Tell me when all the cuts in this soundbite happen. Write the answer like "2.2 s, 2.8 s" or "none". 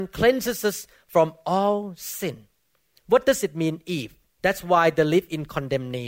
4.3 s